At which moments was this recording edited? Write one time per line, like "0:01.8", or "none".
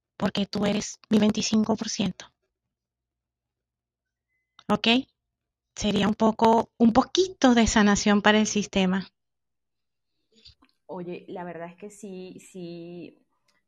none

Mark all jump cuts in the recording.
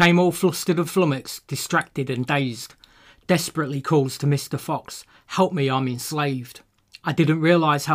none

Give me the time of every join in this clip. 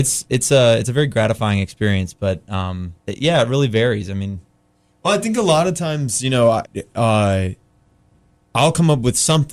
0:03.0
0:06.6

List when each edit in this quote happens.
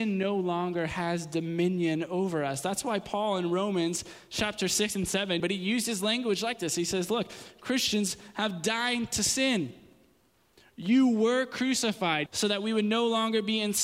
0:05.4
0:12.3

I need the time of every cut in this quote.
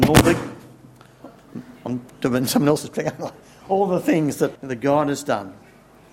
0:04.6

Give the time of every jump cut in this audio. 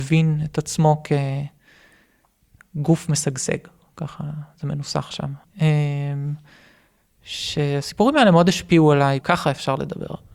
0:05.4
0:09.2

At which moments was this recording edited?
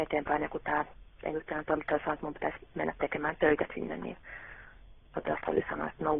none

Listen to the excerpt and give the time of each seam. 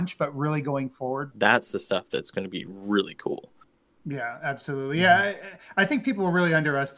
0:01.3

